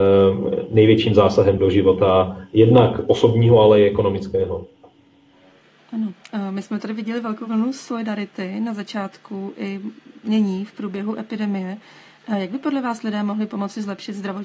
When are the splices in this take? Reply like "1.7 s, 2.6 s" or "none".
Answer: 1.6 s